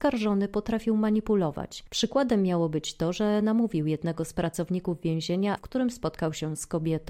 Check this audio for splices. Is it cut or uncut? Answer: cut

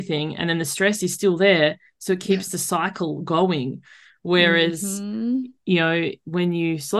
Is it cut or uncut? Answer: uncut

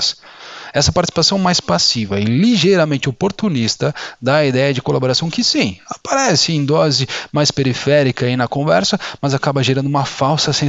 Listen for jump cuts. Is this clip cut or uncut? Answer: uncut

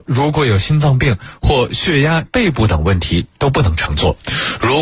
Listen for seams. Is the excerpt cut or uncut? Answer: cut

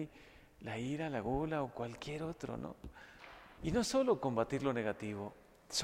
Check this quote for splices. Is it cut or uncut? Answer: cut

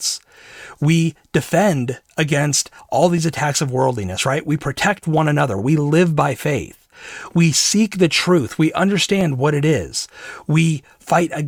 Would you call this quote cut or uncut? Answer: uncut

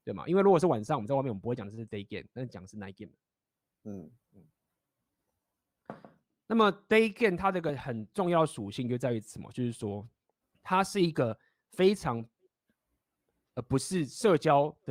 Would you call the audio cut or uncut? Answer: cut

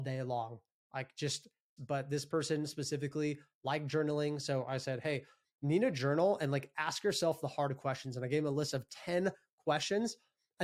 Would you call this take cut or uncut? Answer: cut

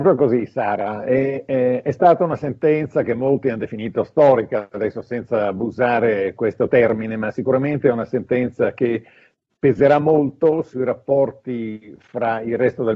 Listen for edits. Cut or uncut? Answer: uncut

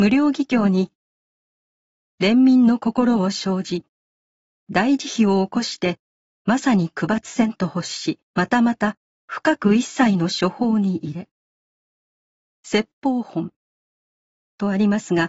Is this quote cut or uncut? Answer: cut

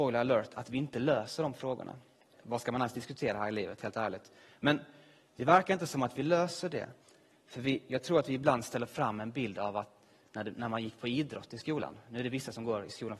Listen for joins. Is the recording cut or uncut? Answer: cut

